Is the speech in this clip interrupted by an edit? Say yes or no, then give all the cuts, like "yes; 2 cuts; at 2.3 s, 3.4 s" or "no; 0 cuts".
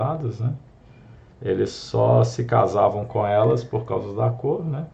yes; 1 cut; at 1.3 s